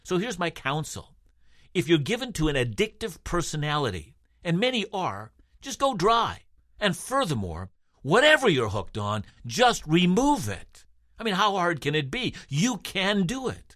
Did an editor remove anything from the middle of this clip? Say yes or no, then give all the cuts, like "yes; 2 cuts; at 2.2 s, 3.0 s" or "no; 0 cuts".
no; 0 cuts